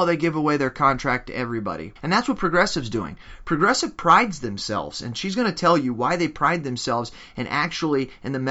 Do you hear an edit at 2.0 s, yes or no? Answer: yes